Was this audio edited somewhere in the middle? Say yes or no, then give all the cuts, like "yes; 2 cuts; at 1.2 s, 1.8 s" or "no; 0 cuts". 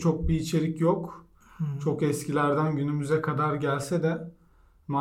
no; 0 cuts